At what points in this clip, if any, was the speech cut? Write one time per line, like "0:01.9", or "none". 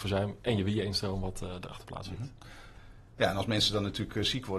none

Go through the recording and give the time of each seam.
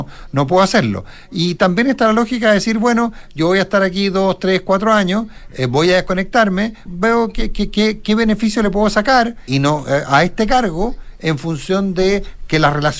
0:06.9
0:09.5

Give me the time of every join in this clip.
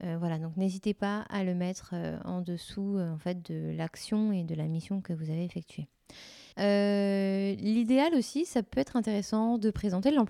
0:06.5

